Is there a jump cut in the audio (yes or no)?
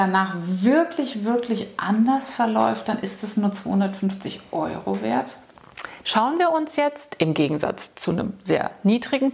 yes